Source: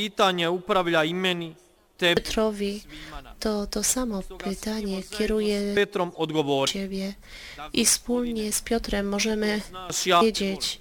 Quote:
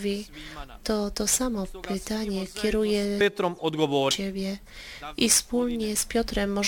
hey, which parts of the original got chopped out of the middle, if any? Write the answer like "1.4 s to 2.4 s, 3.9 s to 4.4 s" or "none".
none